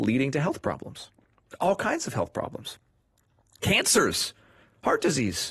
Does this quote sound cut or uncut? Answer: uncut